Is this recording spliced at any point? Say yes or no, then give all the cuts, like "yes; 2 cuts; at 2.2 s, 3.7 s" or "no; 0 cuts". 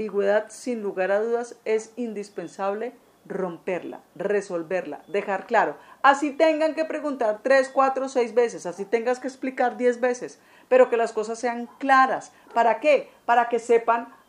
no; 0 cuts